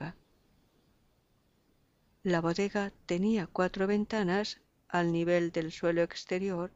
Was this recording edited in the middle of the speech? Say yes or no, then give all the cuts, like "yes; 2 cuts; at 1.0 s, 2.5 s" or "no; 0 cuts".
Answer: yes; 1 cut; at 2.2 s